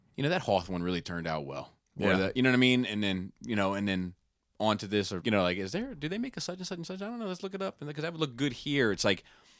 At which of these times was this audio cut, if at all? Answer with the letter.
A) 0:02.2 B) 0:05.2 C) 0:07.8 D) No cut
B